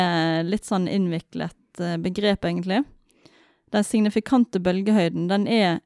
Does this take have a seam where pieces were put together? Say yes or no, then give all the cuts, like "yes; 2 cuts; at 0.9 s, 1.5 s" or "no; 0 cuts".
no; 0 cuts